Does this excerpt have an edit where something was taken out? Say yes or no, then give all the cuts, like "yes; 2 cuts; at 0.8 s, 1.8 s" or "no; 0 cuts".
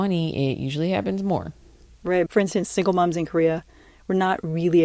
yes; 1 cut; at 2.3 s